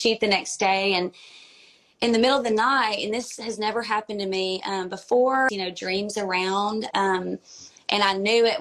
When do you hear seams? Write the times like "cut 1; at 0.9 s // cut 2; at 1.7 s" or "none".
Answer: cut 1; at 5.5 s // cut 2; at 6.9 s